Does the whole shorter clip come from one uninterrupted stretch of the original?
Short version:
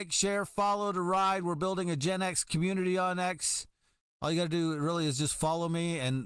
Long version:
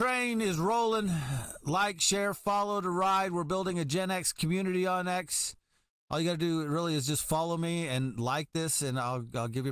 yes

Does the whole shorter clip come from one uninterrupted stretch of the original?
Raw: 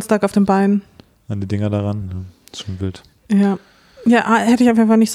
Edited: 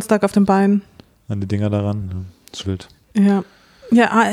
no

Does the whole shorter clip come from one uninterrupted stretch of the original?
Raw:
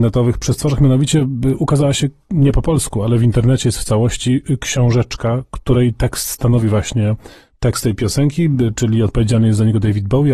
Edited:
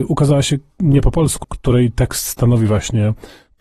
no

